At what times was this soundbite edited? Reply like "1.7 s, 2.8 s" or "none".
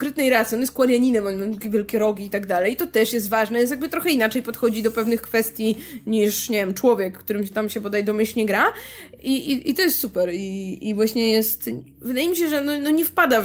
9.2 s